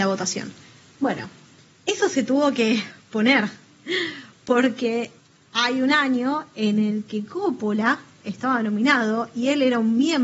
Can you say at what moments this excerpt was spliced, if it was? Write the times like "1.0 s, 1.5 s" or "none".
none